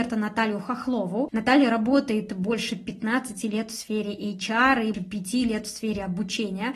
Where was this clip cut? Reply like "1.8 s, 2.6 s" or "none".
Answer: 1.3 s, 4.9 s